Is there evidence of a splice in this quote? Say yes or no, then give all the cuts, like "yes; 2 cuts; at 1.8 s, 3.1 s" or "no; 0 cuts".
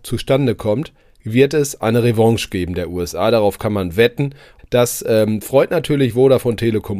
yes; 1 cut; at 4.6 s